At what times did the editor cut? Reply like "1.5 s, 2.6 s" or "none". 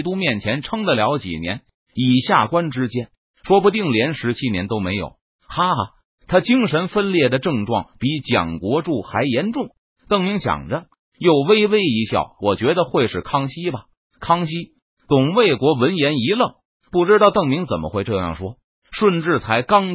none